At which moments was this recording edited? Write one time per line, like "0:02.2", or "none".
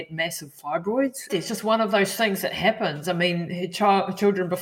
0:01.3

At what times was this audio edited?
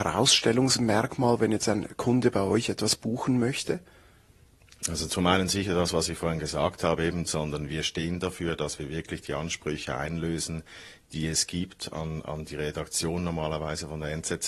0:07.3

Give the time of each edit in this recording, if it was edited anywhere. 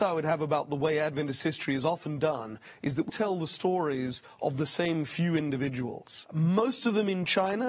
0:03.1
0:06.3

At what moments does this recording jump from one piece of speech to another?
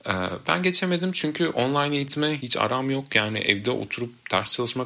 0:02.4

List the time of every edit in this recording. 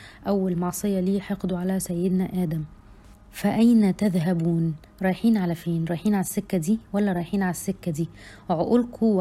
none

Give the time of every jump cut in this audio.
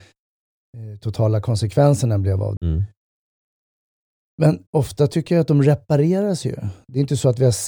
0:02.6
0:04.7

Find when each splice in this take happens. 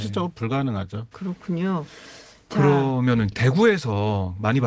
0:01.1

